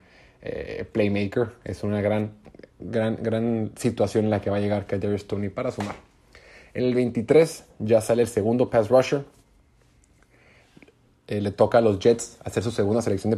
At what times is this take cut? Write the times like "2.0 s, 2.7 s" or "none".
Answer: none